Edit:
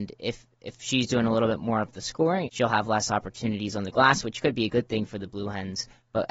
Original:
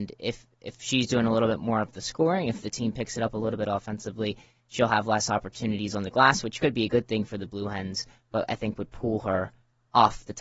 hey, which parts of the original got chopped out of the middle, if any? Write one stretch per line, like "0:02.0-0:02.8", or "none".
0:02.4-0:04.6